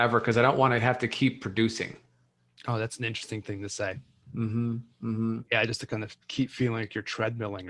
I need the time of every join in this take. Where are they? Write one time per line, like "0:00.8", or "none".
0:06.2